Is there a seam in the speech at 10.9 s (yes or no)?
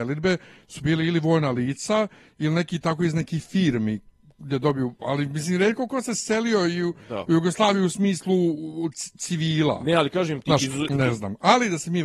yes